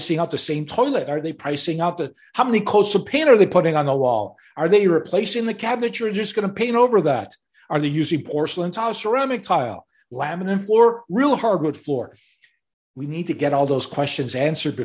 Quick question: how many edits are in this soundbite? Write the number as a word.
zero